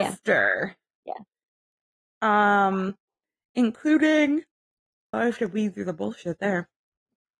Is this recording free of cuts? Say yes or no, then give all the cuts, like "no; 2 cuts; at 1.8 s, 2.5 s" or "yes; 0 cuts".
no; 1 cut; at 5.1 s